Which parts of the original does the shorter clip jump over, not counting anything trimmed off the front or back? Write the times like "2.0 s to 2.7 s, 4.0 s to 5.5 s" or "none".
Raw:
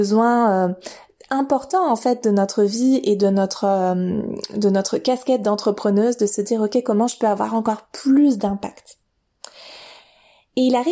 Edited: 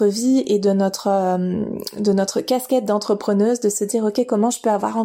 none

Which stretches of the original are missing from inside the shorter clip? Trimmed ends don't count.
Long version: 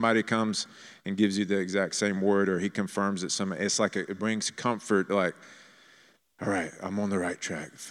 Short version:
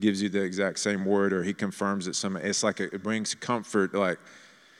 none

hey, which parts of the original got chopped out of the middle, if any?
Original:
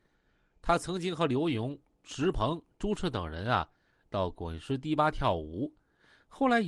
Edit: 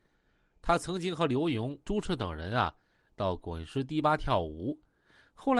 1.8 s to 2.8 s

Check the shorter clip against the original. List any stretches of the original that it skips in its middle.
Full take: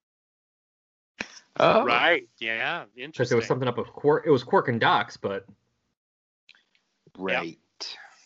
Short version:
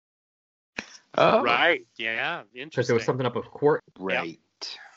4.2 s to 7.0 s

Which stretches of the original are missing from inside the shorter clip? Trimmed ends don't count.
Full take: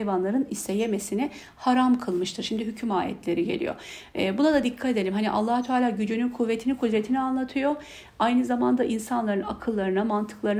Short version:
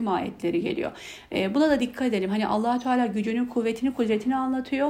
none

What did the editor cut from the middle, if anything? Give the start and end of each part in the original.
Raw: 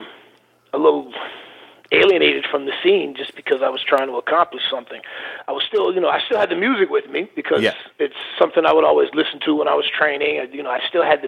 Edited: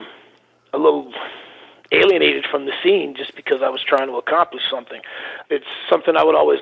5.5 s to 7.9 s

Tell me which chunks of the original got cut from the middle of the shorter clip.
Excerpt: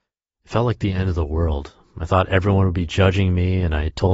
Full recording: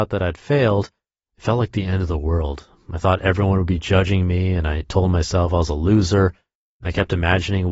none

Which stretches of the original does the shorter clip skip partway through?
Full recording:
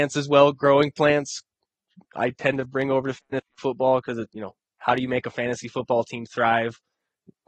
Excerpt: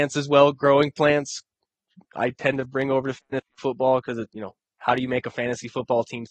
none

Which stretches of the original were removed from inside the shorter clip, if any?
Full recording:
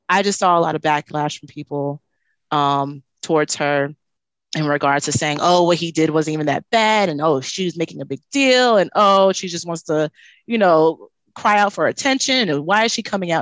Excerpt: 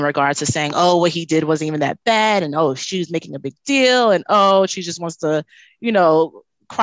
none

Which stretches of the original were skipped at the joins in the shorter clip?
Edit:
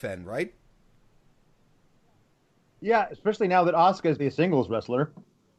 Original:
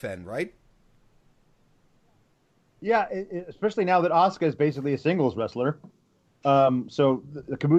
3.1 s to 3.4 s, 4.6 s to 4.9 s

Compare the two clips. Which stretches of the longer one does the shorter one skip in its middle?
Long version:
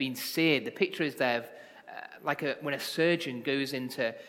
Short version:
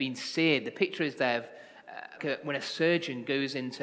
2.2 s to 2.4 s

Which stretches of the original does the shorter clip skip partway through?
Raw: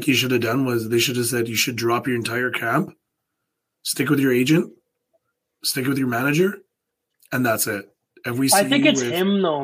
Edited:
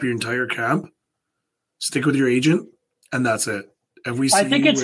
5.1 s to 7.2 s

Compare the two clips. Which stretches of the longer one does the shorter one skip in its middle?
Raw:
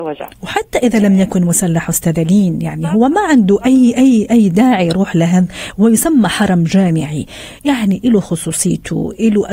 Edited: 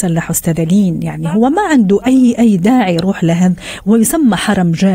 3.9 s to 4.3 s

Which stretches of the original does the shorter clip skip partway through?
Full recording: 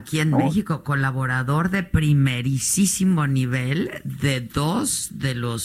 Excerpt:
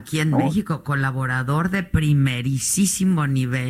none

